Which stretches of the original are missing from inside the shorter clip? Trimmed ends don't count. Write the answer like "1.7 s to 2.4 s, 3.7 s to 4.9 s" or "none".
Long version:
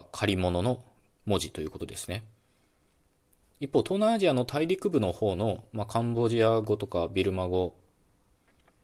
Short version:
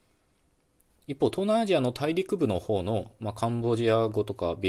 none